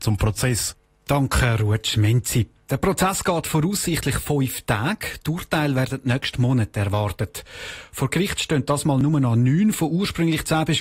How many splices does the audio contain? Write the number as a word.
zero